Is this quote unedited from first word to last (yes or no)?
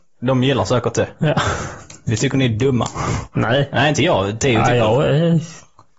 yes